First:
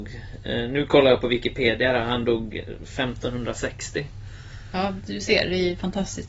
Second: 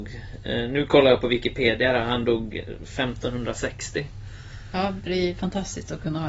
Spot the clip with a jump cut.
second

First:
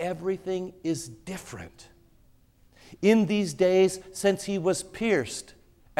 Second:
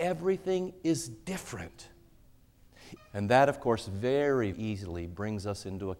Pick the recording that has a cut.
second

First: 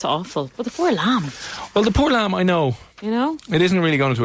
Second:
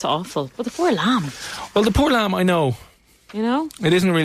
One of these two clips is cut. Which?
first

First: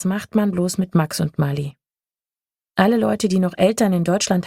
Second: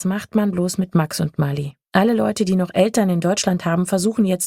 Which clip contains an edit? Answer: second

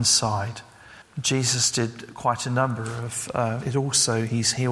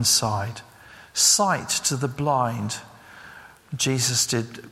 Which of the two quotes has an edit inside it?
first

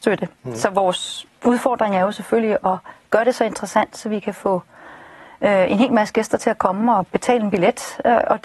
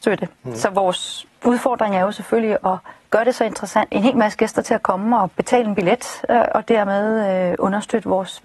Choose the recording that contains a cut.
second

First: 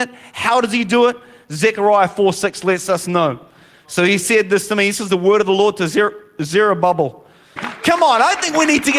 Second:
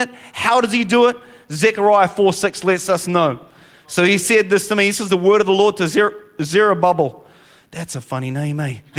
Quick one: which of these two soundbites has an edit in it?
first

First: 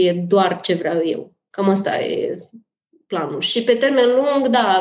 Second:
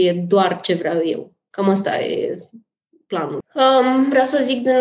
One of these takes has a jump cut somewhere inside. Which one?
second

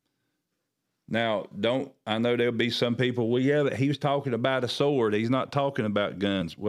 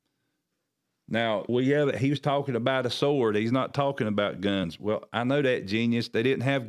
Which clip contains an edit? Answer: second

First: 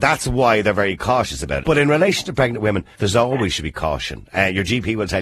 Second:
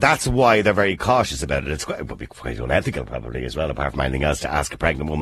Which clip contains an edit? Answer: first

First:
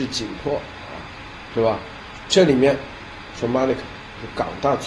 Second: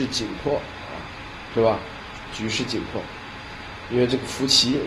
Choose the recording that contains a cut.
first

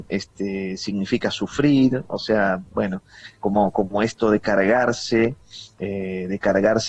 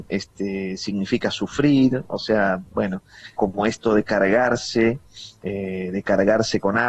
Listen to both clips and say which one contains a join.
second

